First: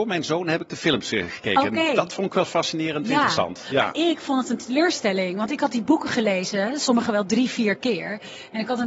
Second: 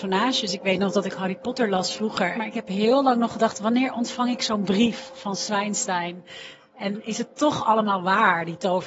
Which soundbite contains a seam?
second; 1 cut; at 2.3 s

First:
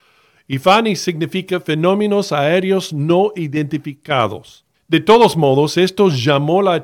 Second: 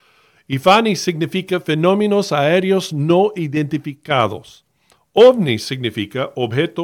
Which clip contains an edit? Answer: first; 1 cut; at 4.7 s

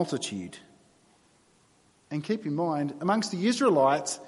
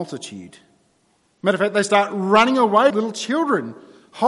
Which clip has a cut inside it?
second; 2 cuts; at 1.3 s, 2.9 s

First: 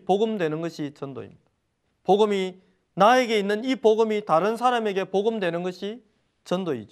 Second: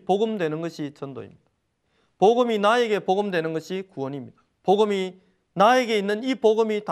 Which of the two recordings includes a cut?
first; 1 cut; at 1.9 s

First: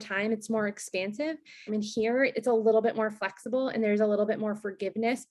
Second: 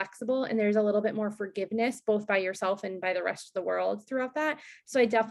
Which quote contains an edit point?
first; 1 cut; at 1.7 s

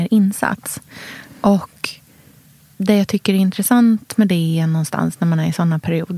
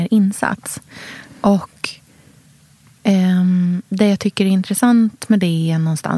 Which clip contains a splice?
first; 1 cut; at 2.7 s

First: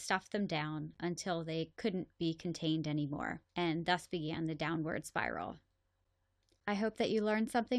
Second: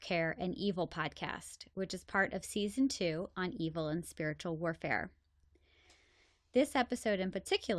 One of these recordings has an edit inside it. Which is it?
first; 1 cut; at 3.5 s

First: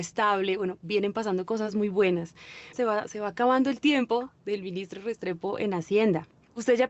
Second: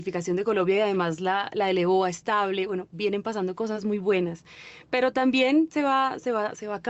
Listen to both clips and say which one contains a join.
first; 1 cut; at 2.7 s

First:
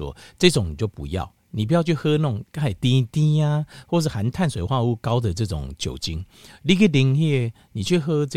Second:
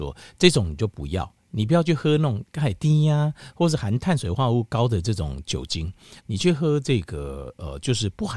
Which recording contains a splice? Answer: second; 2 cuts; at 2.8 s, 6.2 s

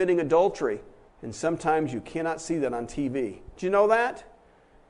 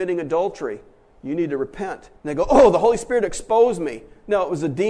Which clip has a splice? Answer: first; 2 cuts; at 1.1 s, 3.5 s

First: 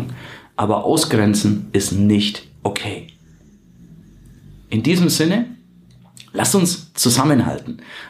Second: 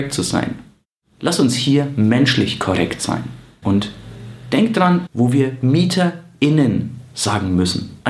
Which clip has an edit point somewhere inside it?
second; 2 cuts; at 3.6 s, 5.1 s

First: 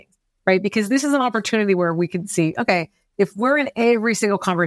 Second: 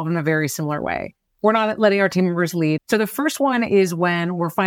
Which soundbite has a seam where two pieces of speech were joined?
second; 2 cuts; at 1.3 s, 2.8 s

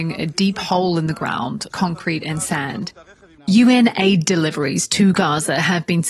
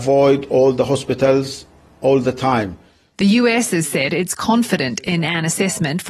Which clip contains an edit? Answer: first; 2 cuts; at 1.7 s, 3.4 s

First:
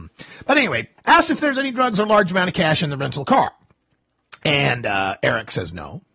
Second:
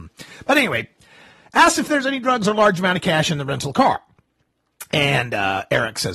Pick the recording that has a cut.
first; 1 cut; at 1.0 s

